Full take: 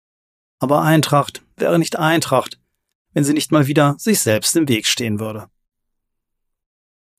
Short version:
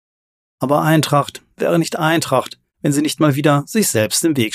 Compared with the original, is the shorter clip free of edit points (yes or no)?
no